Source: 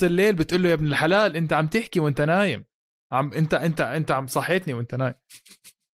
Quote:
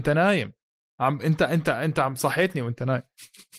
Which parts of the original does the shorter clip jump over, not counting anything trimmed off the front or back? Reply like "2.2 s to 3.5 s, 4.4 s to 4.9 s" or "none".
none